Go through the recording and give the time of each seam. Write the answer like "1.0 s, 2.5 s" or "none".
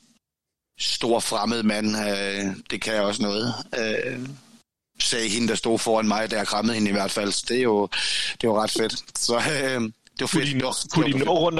none